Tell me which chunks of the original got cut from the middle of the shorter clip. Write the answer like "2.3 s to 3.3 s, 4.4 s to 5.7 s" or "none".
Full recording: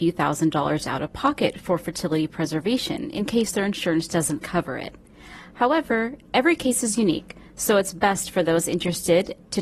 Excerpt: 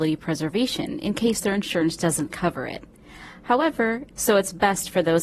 6.2 s to 7.5 s